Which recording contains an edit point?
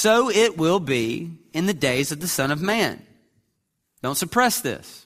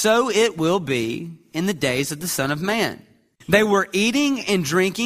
second; 1 cut; at 3.3 s

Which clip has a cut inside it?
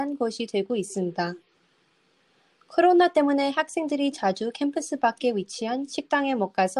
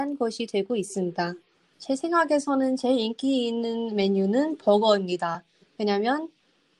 second; 1 cut; at 1.7 s

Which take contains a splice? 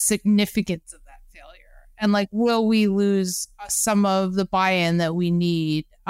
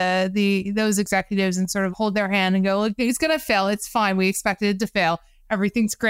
second; 1 cut; at 1.9 s

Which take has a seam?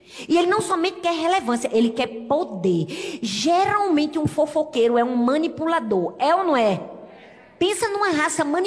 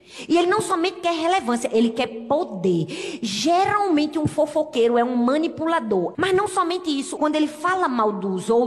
second; 2 cuts; at 6.1 s, 7.2 s

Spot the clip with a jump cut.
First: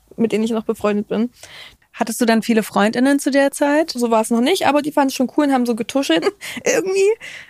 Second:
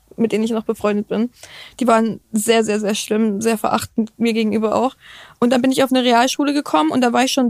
first; 3 cuts; at 1.8 s, 4.0 s, 6.2 s

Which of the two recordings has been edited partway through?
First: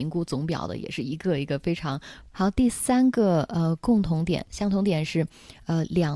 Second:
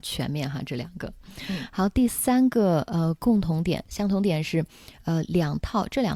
first; 1 cut; at 2.3 s

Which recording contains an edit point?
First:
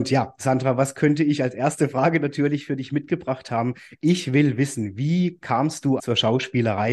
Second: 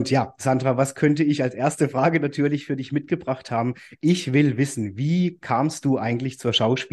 first; 1 cut; at 6.0 s

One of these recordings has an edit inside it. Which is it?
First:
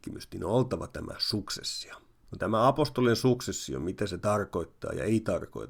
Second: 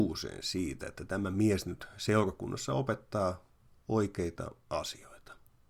first; 1 cut; at 2.2 s

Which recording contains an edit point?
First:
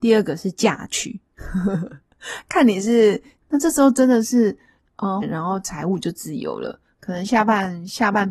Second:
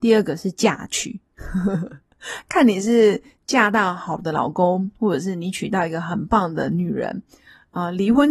first; 2 cuts; at 3.4 s, 5.2 s

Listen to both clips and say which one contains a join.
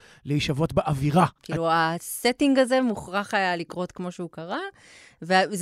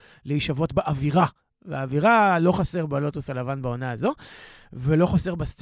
first; 1 cut; at 1.4 s

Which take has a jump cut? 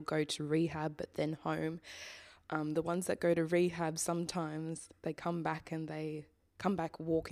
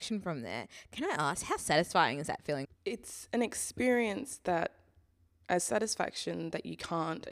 second; 1 cut; at 2.6 s

